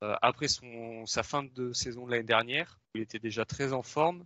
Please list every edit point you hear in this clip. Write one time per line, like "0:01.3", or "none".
0:02.8